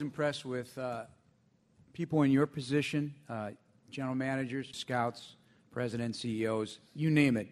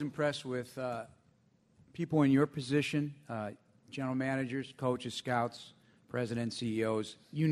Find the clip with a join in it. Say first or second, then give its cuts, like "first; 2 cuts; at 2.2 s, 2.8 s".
first; 1 cut; at 4.7 s